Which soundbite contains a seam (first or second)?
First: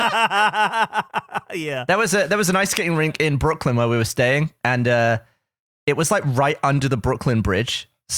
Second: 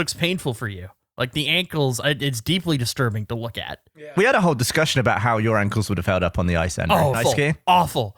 second